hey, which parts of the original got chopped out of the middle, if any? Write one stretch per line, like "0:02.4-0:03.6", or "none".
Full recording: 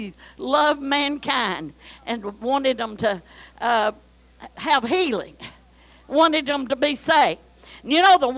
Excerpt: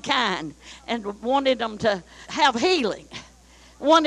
0:03.4-0:04.5

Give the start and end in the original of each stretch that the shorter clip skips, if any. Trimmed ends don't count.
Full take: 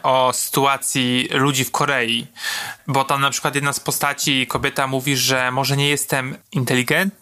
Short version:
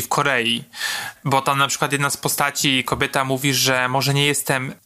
none

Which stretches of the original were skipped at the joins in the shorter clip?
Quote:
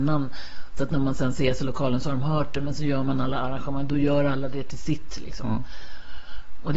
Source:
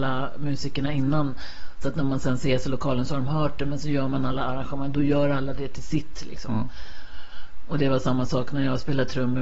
none

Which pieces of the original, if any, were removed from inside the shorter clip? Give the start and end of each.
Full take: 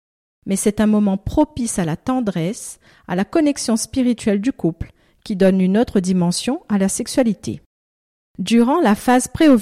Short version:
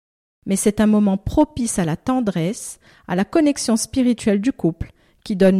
none

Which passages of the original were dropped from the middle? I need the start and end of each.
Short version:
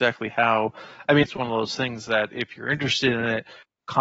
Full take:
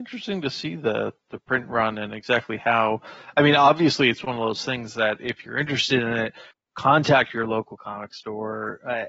0:03.5-0:04.1

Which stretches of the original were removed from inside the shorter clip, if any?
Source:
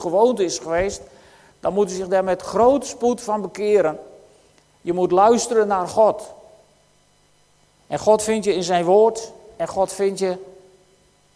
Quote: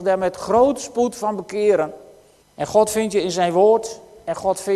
0:04.5-0:07.7

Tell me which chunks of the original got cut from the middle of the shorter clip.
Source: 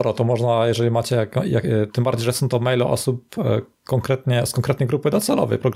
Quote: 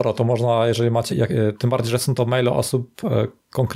0:01.1-0:01.4

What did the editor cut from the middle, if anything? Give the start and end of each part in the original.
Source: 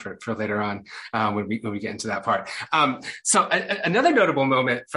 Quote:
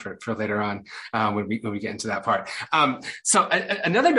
none

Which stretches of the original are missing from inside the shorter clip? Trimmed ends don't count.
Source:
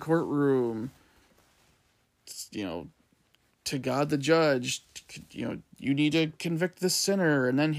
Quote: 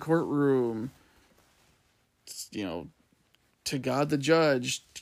none

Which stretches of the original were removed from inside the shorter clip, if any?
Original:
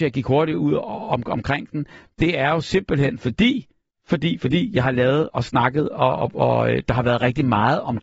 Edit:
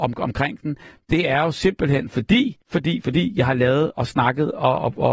0:03.7-0:04.0

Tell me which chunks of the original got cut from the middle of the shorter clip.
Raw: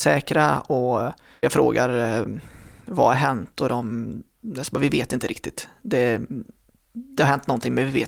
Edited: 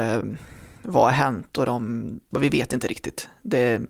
0:04.3-0:04.7

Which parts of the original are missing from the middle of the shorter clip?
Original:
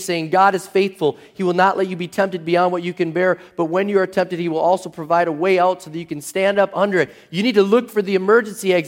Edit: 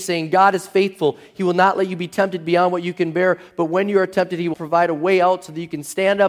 0:04.5-0:04.9

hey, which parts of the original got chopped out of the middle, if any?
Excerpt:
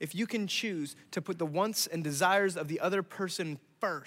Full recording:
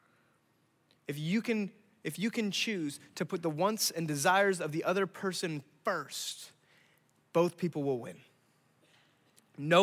none

